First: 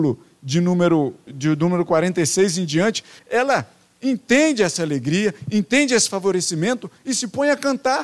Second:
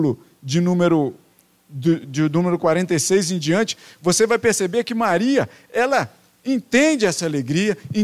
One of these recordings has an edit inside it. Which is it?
first; 2 cuts; at 1.3 s, 3.2 s

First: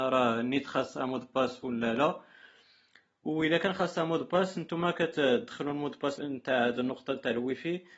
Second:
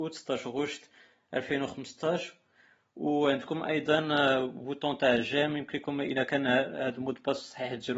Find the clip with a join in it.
first; 1 cut; at 6.2 s

